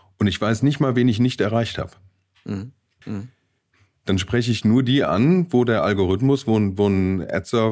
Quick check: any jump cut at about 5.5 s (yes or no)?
no